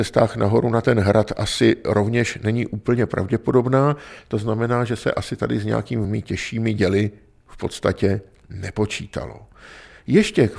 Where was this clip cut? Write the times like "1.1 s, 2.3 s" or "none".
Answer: none